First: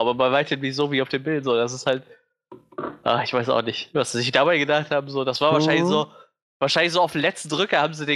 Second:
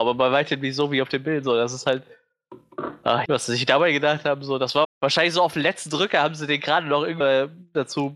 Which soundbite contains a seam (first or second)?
second